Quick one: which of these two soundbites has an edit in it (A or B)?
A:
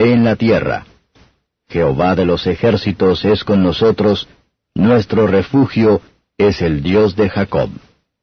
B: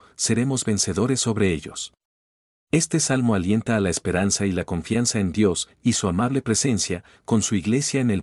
B